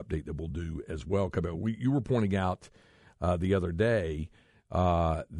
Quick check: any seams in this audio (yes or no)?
no